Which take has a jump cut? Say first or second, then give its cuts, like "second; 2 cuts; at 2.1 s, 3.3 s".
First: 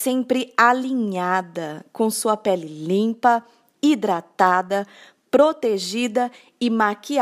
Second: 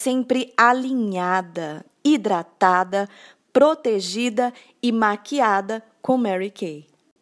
second; 1 cut; at 1.9 s